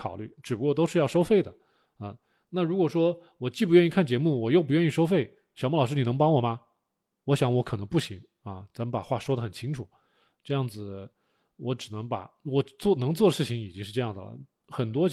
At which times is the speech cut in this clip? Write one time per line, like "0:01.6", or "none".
none